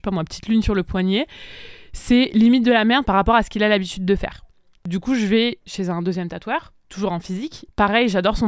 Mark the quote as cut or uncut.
cut